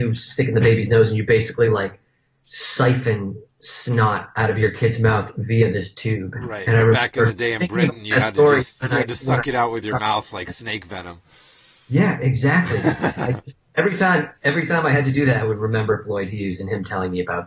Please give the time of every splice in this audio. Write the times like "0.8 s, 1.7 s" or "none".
none